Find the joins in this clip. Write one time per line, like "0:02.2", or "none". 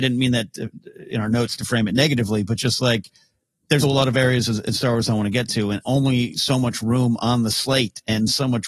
0:03.8